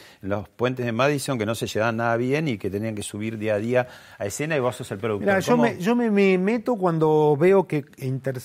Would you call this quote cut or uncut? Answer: uncut